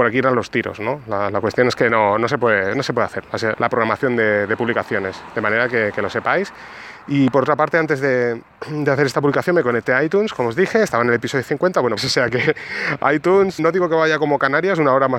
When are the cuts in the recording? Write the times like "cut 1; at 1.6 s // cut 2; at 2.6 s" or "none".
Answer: cut 1; at 3.5 s // cut 2; at 12.0 s // cut 3; at 13.6 s